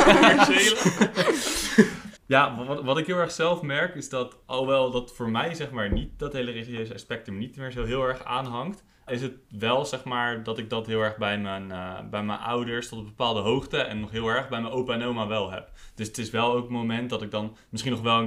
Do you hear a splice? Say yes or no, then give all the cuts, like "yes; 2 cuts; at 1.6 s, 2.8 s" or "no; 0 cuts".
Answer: yes; 2 cuts; at 2.2 s, 9.1 s